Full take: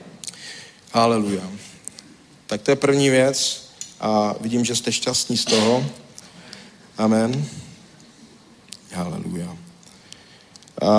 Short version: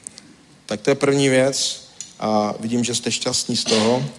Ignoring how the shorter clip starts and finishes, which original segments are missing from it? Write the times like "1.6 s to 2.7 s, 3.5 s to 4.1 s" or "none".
none